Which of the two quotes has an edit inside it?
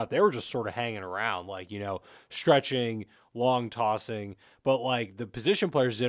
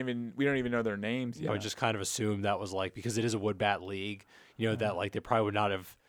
second; 1 cut; at 1.5 s

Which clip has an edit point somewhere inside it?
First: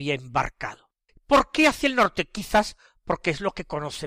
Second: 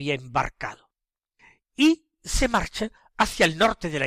first; 1 cut; at 1.1 s

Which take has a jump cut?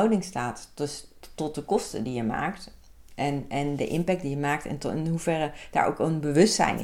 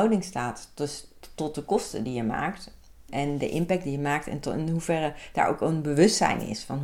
second; 1 cut; at 3.1 s

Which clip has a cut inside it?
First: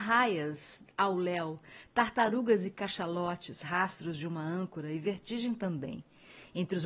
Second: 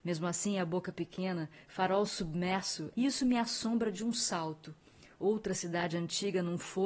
second; 1 cut; at 2.9 s

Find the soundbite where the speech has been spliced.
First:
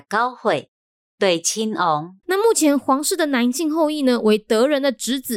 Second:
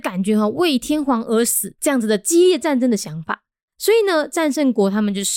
first; 1 cut; at 2.2 s

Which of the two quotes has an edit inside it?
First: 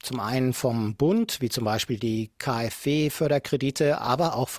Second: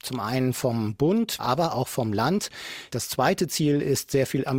second; 2 cuts; at 1.4 s, 2.9 s

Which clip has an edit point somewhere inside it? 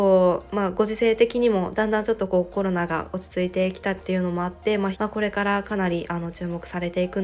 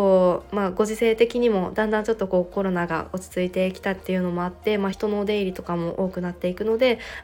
first; 1 cut; at 4.9 s

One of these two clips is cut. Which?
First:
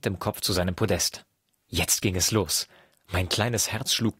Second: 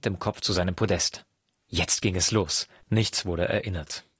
second; 1 cut; at 2.8 s

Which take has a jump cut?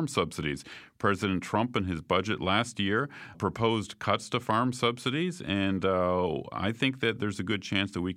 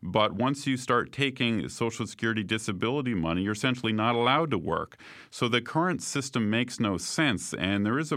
first; 1 cut; at 3.3 s

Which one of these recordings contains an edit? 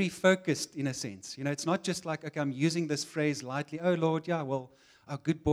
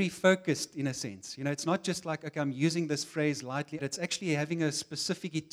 second; 1 cut; at 3.8 s

